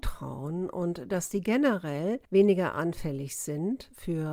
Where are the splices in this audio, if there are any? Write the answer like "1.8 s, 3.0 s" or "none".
none